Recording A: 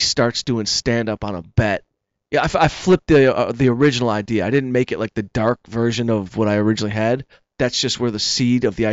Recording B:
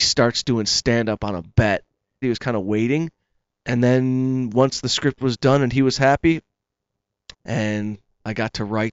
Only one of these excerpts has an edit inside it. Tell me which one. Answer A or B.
B